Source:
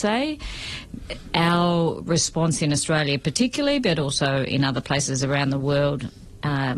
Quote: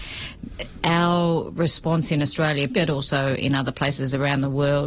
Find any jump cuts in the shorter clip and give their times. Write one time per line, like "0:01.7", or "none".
0:02.7